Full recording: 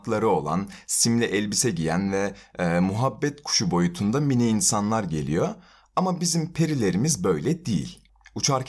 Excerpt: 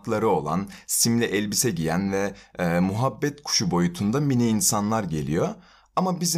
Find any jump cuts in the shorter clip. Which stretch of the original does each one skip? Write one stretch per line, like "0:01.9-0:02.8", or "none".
none